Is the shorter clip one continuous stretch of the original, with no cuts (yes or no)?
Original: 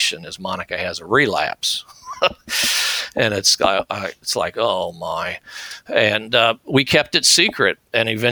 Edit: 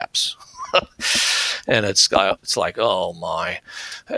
no